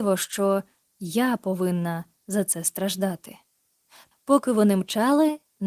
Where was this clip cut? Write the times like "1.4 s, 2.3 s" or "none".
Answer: 4.1 s